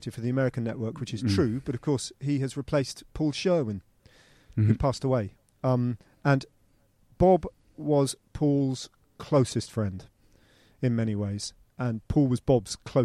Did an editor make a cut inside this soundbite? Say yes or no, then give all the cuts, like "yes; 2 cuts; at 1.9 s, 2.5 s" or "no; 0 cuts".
no; 0 cuts